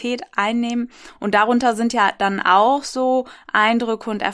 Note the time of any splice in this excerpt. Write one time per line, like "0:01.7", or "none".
none